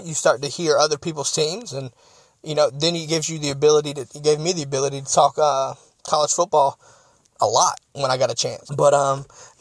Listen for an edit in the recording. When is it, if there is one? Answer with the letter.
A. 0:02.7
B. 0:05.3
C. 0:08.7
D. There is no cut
C